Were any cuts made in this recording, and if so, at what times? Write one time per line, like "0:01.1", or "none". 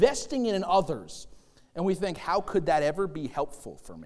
none

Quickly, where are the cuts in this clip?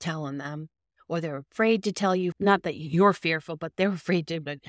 0:02.3

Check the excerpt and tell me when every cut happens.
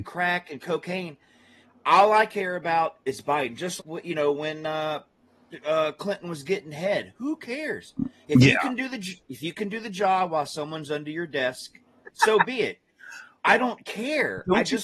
0:03.8
0:12.0

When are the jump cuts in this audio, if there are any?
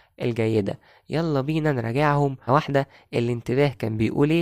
0:02.5

